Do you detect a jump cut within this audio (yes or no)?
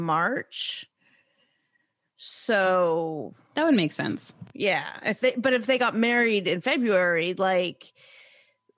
no